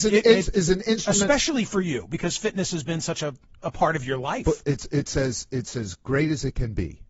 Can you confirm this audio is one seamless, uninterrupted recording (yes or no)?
yes